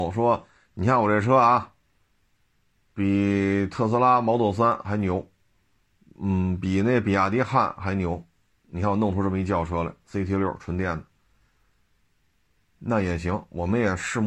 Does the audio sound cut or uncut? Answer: uncut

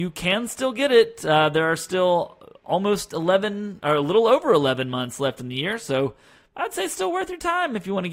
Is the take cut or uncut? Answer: uncut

